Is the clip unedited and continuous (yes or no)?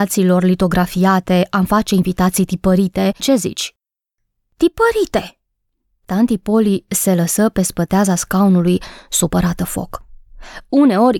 no